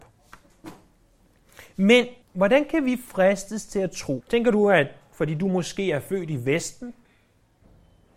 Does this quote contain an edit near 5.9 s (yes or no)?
no